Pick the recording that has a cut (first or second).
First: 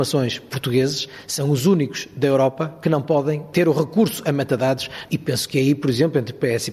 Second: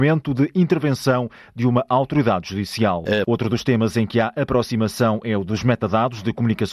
second